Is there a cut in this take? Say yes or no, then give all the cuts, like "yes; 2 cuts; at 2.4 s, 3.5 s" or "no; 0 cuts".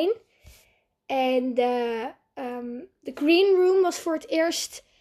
no; 0 cuts